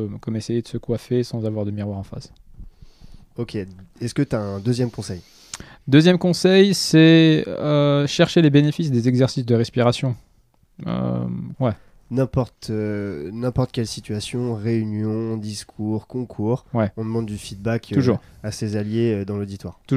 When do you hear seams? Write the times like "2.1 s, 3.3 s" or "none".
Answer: 11.5 s